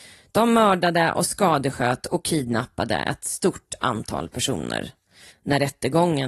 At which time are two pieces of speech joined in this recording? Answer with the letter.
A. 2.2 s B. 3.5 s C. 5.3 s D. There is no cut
C